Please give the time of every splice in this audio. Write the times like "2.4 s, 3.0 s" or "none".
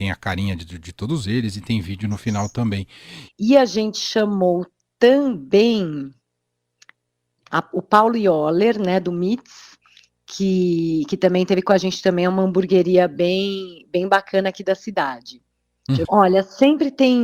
3.3 s, 16.0 s